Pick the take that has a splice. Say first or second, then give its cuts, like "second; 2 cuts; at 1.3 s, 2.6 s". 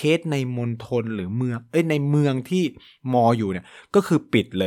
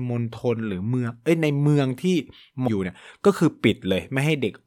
second; 1 cut; at 2.7 s